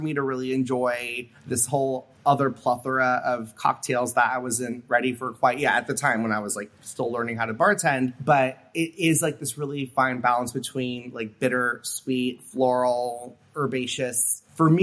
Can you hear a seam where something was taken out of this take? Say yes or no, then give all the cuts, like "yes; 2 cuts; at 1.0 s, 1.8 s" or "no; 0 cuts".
no; 0 cuts